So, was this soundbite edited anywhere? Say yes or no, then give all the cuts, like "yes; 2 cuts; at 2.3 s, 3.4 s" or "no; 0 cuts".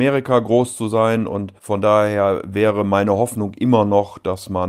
yes; 1 cut; at 1.6 s